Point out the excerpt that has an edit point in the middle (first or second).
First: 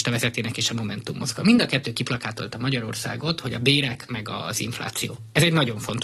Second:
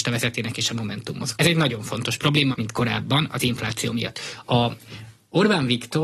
second